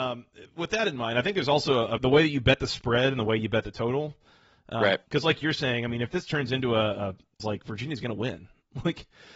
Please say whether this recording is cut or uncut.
cut